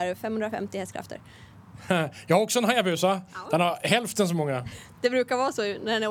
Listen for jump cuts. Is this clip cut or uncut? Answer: uncut